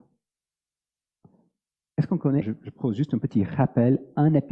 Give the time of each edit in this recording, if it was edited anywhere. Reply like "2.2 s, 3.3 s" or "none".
2.4 s